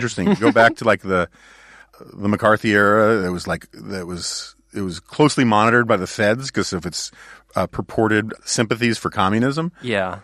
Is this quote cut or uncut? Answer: uncut